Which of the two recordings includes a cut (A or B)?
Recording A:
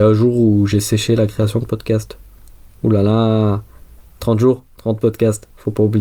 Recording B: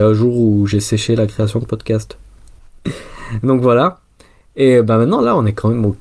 B